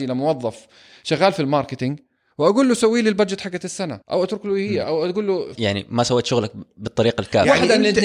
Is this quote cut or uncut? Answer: cut